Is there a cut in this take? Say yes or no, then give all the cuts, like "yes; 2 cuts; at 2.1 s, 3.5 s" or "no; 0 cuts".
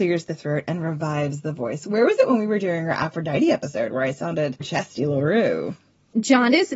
yes; 1 cut; at 4.6 s